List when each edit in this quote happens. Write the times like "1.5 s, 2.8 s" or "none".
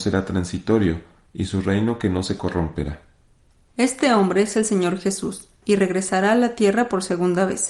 5.6 s

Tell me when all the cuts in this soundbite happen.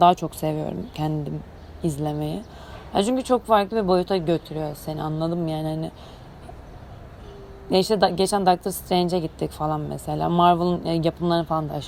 none

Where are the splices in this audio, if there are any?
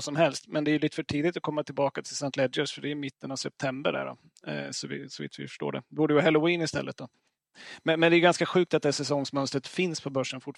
none

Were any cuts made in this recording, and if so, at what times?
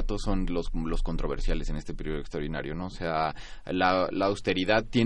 none

